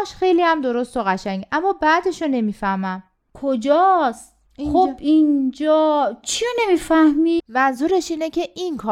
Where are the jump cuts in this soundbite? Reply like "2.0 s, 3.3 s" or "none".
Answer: 4.5 s, 7.4 s